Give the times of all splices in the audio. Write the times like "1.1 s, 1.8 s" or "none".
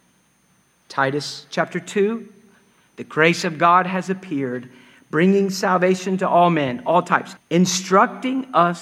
7.4 s